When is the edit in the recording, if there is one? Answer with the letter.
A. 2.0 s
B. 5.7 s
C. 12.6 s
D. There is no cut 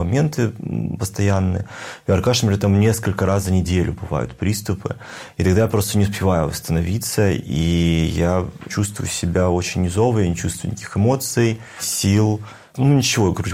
D